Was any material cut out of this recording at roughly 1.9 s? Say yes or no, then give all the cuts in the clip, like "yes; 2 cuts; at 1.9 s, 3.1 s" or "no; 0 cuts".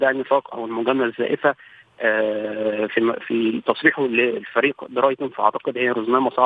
no; 1 cut; at 3.2 s